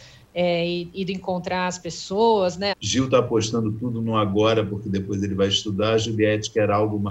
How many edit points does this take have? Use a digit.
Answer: 1